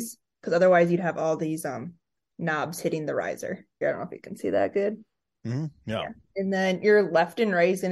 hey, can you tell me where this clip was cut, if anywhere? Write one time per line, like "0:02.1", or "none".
0:03.8